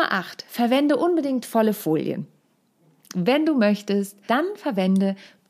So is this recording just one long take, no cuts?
no; 1 cut; at 4.3 s

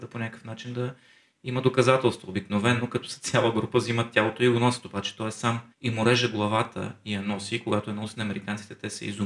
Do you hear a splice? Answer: yes; 1 cut; at 5.7 s

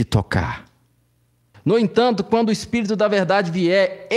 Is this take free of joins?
no; 1 cut; at 1.5 s

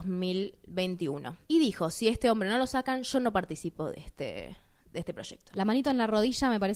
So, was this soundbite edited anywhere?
yes; 2 cuts; at 1.4 s, 5.5 s

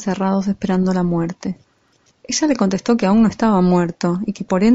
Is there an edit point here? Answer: yes; 1 cut; at 2.1 s

